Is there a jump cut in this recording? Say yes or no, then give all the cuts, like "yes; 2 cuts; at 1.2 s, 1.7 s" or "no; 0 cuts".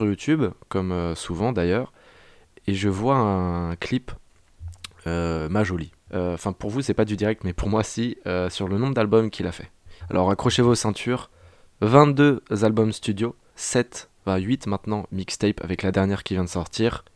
yes; 2 cuts; at 6.1 s, 10.0 s